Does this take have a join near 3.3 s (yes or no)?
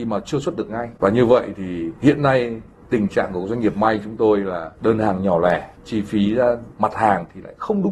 no